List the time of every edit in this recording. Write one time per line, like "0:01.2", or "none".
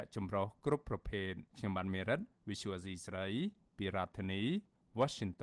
0:01.5